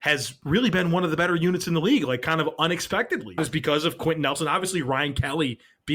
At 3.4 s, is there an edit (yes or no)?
yes